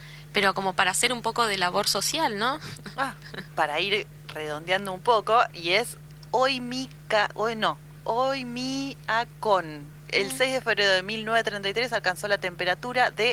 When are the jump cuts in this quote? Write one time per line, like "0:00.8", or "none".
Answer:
0:03.5
0:05.5